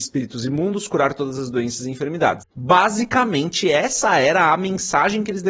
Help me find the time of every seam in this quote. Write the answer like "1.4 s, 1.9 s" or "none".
2.4 s